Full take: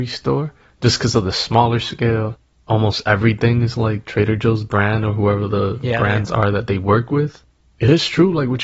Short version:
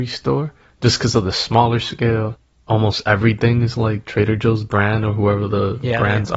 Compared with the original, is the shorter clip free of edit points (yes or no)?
yes